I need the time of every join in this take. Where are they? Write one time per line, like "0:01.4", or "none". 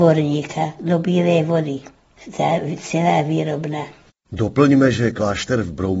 none